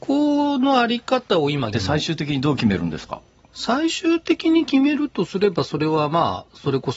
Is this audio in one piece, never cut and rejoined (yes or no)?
no